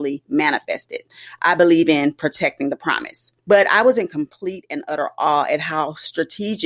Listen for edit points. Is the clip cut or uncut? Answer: cut